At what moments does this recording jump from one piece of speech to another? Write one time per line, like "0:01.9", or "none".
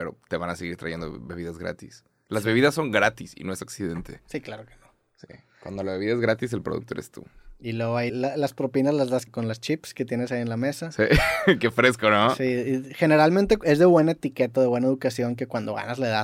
0:08.1
0:09.3